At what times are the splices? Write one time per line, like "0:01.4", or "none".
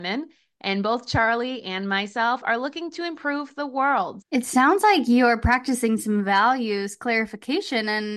0:04.2